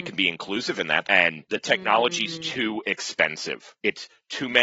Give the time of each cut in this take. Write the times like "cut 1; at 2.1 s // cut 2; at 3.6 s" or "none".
cut 1; at 1.0 s

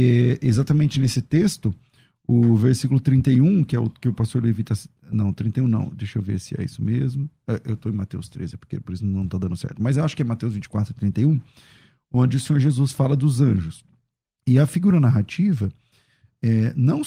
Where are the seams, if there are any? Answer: none

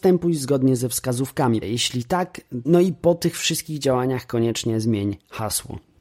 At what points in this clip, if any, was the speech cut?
cut 1; at 1.6 s // cut 2; at 2.6 s

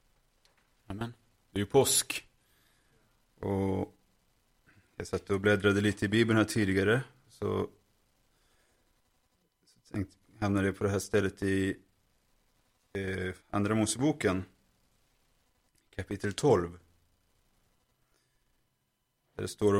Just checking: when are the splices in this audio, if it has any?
cut 1; at 13.4 s

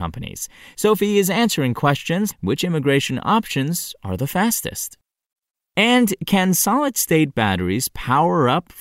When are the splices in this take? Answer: cut 1; at 2.3 s

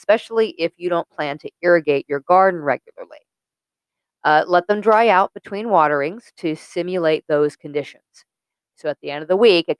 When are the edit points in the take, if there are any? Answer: cut 1; at 8.7 s

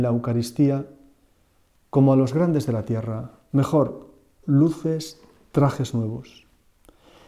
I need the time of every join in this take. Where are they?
cut 1; at 4.4 s

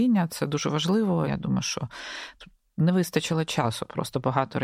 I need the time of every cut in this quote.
cut 1; at 1.3 s

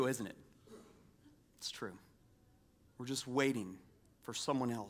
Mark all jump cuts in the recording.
cut 1; at 2.9 s

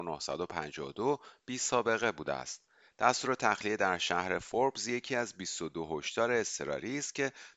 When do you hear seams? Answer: none

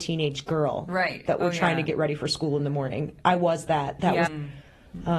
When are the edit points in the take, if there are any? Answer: cut 1; at 4.3 s

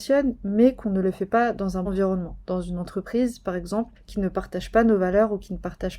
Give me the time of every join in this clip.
cut 1; at 1.8 s

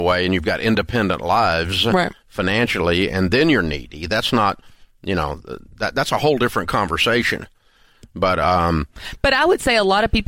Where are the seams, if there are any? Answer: none

